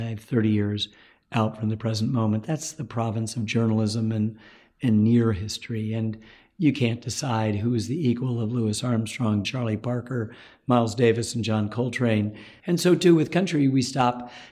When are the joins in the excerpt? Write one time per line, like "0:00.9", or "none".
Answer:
0:09.4
0:12.6